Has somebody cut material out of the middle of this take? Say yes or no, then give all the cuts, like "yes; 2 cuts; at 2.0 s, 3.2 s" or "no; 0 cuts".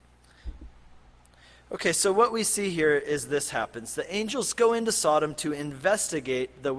no; 0 cuts